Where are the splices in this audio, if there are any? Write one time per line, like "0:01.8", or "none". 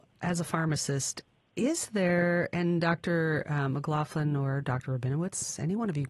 none